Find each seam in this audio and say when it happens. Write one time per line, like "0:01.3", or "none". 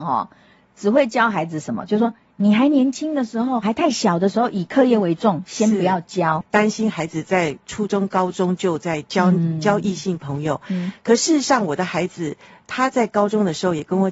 0:06.4